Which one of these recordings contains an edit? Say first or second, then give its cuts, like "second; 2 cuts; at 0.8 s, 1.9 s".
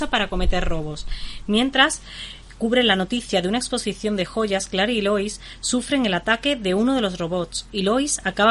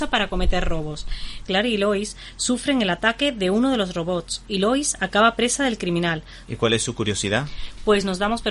second; 2 cuts; at 1.4 s, 6.4 s